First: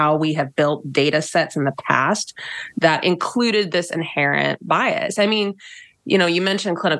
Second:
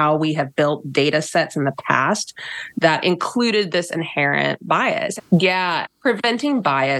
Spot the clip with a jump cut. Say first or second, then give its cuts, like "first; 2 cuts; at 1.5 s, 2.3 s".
second; 1 cut; at 5.2 s